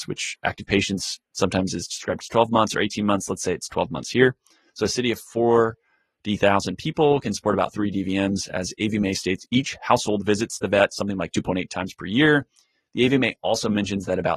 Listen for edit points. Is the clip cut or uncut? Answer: uncut